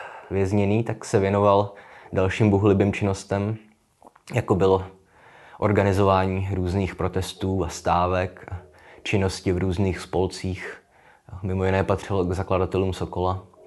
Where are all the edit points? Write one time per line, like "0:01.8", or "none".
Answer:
none